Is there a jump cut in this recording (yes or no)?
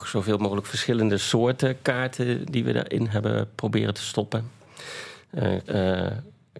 yes